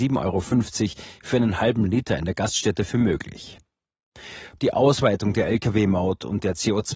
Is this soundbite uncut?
no; 1 cut; at 4.6 s

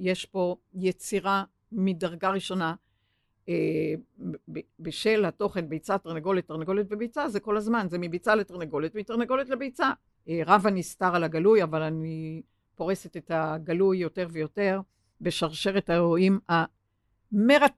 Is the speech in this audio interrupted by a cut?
yes; 1 cut; at 10.1 s

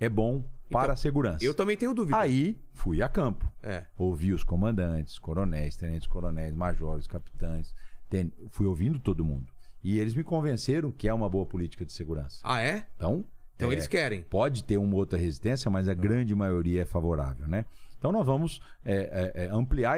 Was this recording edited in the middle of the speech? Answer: no; 0 cuts

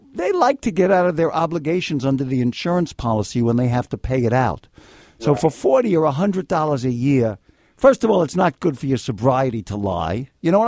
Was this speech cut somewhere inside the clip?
no; 0 cuts

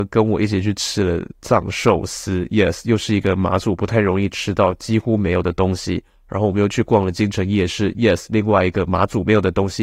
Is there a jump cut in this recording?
no; 0 cuts

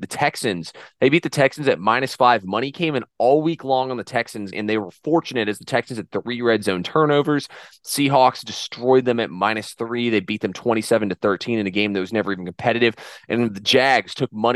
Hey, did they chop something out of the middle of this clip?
yes; 1 cut; at 4.5 s

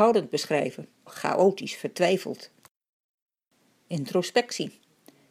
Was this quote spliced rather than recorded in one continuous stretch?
yes; 1 cut; at 1.1 s

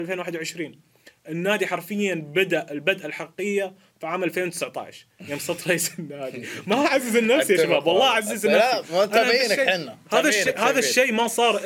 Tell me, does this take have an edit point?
no; 0 cuts

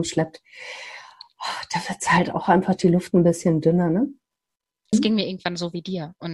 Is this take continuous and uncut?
no; 1 cut; at 4.9 s

